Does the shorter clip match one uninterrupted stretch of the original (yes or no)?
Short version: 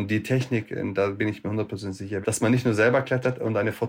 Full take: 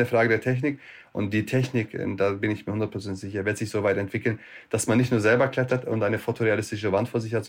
no